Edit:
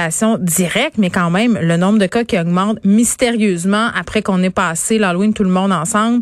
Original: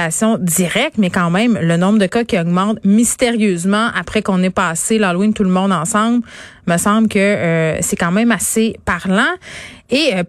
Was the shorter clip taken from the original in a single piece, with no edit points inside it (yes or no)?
yes